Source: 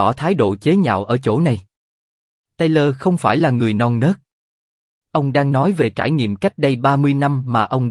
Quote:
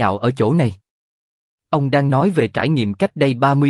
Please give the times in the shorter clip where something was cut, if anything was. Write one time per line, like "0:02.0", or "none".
0:01.6